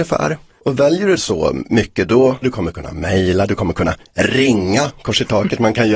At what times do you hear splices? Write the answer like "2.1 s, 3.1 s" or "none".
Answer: 2.4 s